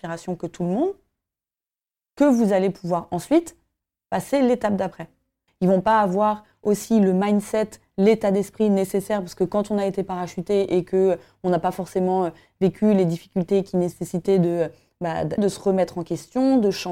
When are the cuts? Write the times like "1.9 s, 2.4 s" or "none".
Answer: 5.5 s, 15.4 s